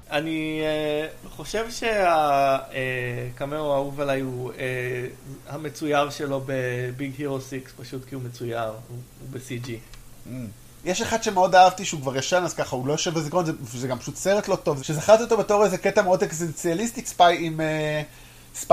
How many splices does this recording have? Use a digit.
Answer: 3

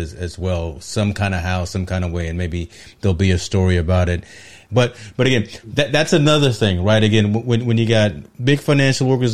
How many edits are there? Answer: 1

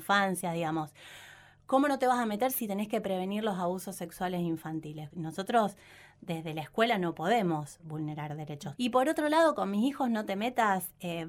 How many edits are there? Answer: 2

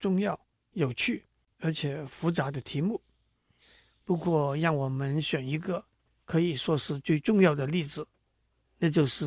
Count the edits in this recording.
0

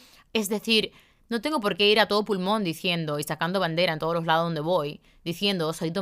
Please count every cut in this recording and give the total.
0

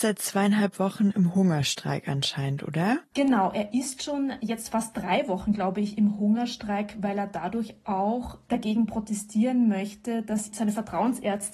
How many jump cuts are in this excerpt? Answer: 0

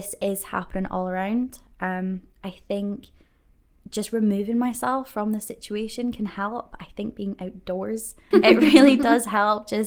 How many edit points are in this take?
1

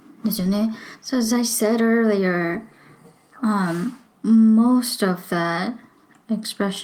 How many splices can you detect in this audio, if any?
1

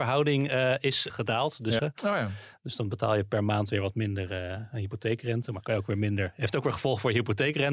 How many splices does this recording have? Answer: 1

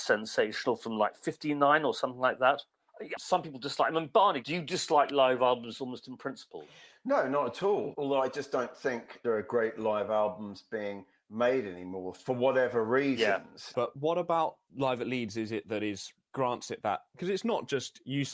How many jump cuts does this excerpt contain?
3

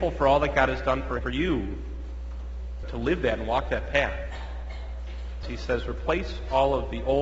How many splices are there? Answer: 3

